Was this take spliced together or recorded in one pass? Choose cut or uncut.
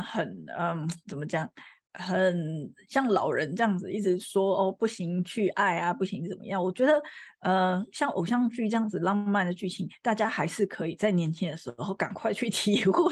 uncut